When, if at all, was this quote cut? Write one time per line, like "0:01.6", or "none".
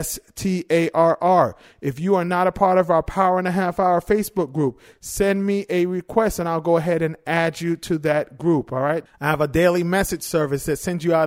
0:09.1